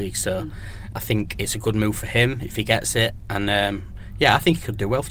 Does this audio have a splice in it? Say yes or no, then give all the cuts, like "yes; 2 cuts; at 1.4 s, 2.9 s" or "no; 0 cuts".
yes; 1 cut; at 0.9 s